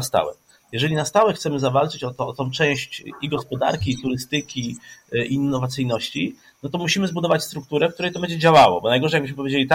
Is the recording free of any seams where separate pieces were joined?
yes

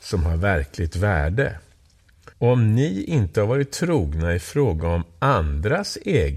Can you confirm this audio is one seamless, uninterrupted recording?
no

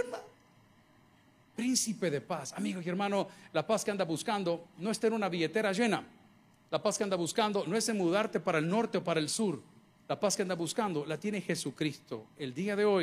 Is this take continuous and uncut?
yes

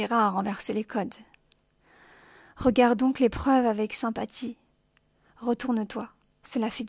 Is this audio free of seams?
yes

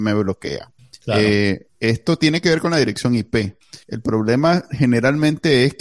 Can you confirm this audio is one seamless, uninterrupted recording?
yes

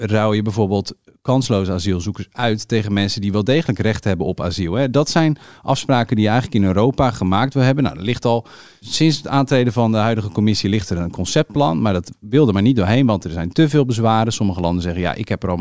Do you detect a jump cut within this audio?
no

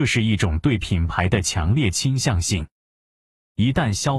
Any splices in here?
no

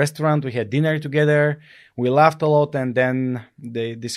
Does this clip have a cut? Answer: no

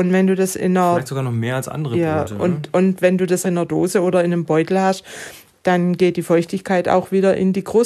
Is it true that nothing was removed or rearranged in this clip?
no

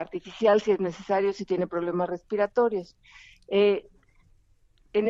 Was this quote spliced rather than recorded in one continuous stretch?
no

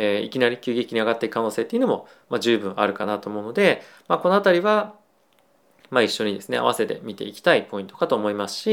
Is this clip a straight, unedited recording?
yes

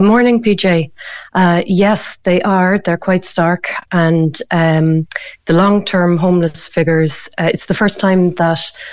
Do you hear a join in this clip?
no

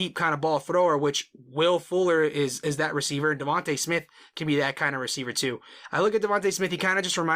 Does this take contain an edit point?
no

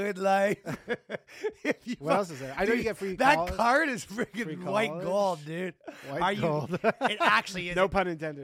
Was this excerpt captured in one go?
yes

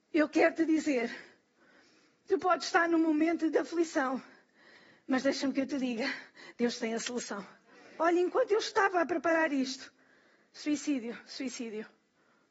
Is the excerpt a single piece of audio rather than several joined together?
no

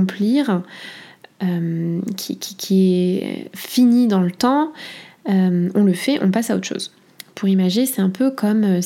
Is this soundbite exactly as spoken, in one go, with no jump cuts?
yes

